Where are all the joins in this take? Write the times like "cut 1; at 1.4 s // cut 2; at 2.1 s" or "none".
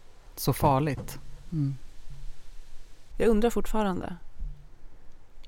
cut 1; at 1.5 s // cut 2; at 3.1 s